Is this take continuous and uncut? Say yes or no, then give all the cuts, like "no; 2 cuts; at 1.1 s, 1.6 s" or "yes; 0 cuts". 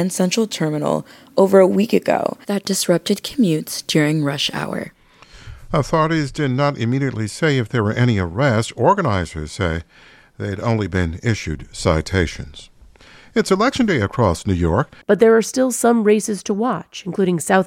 no; 1 cut; at 15.0 s